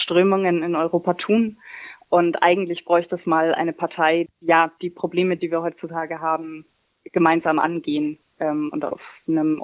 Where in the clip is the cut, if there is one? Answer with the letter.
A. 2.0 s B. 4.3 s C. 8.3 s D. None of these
B